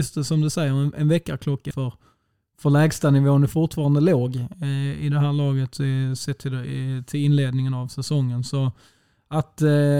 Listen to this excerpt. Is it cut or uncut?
cut